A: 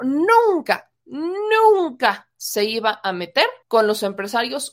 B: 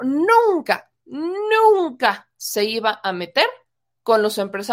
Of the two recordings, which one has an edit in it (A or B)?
A